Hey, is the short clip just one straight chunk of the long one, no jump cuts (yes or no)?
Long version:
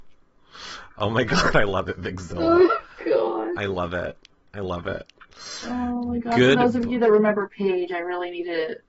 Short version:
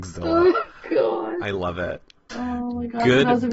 no